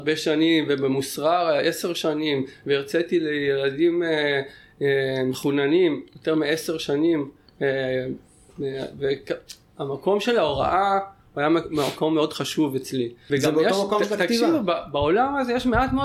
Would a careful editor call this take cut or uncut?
cut